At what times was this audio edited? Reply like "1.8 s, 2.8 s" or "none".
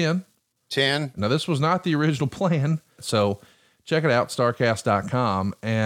1.2 s, 3.0 s